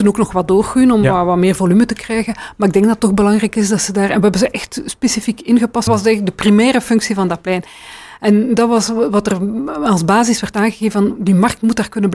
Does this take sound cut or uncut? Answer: cut